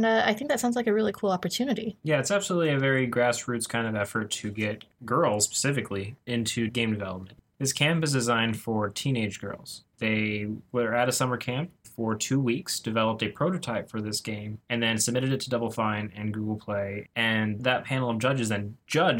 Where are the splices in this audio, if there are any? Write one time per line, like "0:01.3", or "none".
0:09.9